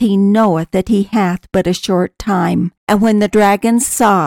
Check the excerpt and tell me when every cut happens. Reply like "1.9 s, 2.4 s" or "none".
2.8 s